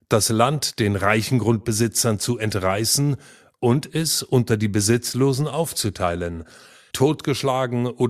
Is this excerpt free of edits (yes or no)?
no